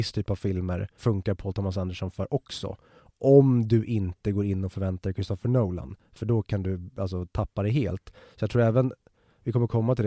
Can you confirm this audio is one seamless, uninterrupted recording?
no; 1 cut; at 1.0 s

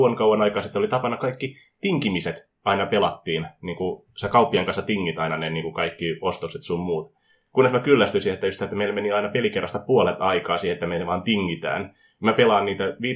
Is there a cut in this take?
no; 0 cuts

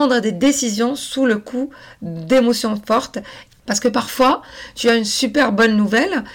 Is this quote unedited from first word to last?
no; 1 cut; at 3.5 s

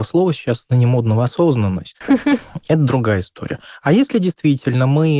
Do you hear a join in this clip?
yes; 1 cut; at 2.0 s

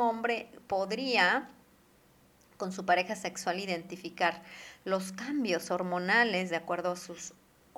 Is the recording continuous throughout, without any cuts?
yes; 0 cuts

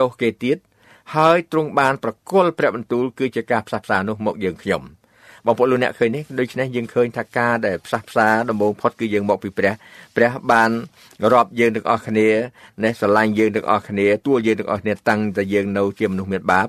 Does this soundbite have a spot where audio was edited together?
yes; 1 cut; at 14.2 s

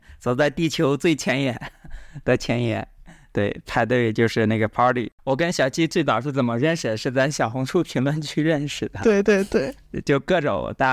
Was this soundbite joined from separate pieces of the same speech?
yes; 1 cut; at 5.2 s

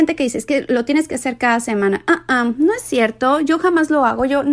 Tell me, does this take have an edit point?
no; 0 cuts

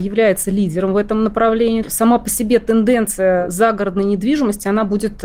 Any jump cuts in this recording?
yes; 1 cut; at 1.8 s

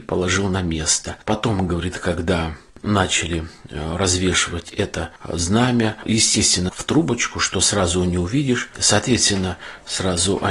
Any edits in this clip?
yes; 2 cuts; at 6.7 s, 8.7 s

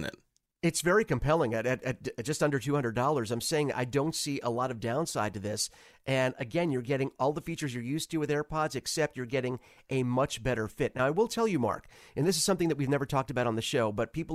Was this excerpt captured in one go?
yes; 0 cuts

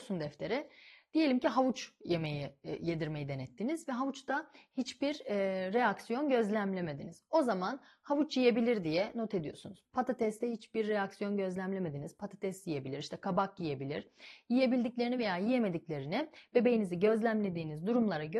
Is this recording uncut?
yes; 0 cuts

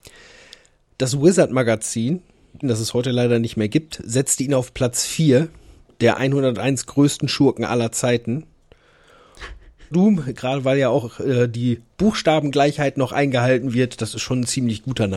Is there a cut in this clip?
yes; 2 cuts; at 2.6 s, 9.9 s

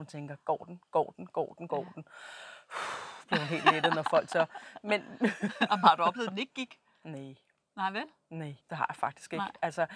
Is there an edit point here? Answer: yes; 1 cut; at 8.6 s

